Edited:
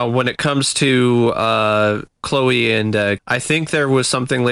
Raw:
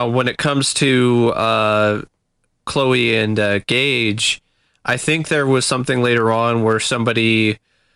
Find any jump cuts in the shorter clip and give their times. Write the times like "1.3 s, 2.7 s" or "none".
2.1 s, 3.2 s